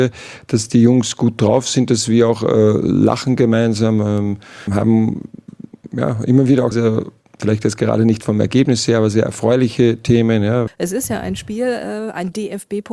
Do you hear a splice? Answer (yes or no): yes